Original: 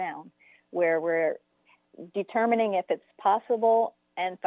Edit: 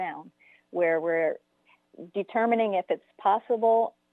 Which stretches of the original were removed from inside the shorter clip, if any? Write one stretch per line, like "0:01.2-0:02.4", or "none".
none